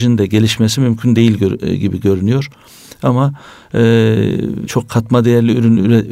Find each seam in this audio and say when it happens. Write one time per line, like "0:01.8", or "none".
0:04.7